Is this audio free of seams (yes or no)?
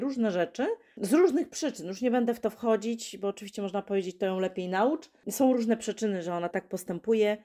no